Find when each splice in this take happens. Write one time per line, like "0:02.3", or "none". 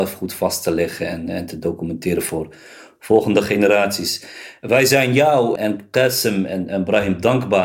0:05.6